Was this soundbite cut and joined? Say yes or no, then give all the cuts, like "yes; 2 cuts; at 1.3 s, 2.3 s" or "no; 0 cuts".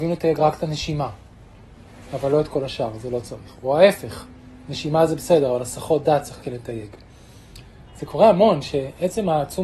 yes; 1 cut; at 7.9 s